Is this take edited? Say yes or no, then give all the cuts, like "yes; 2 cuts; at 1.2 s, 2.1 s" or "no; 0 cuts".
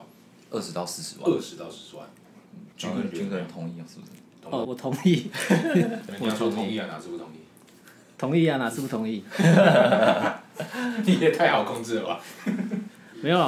yes; 2 cuts; at 2.7 s, 4.6 s